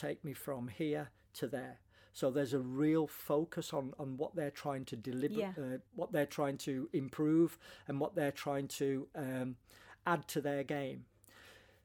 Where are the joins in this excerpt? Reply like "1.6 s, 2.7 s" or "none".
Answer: 5.9 s